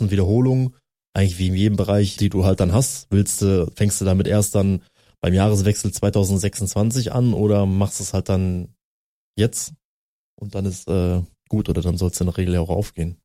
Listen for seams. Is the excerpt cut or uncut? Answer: cut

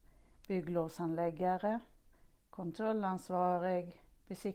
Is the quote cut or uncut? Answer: cut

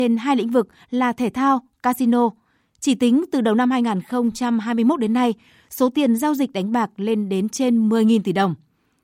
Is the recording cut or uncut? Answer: uncut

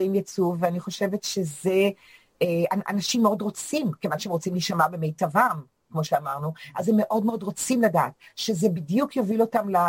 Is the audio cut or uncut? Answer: uncut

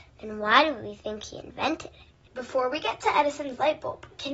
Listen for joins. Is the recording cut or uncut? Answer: uncut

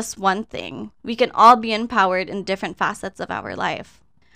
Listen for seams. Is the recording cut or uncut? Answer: uncut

